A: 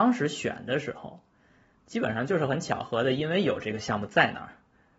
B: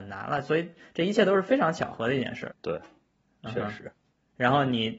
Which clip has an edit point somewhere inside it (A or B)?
B